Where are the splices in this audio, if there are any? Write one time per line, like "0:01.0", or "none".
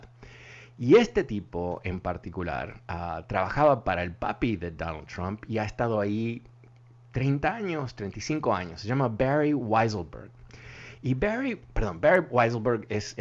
none